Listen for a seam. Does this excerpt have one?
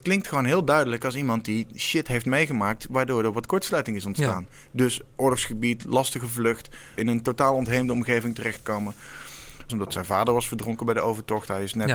yes; 2 cuts; at 7.0 s, 9.7 s

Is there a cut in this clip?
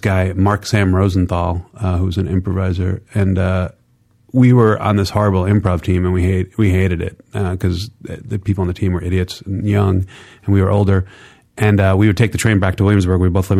no; 0 cuts

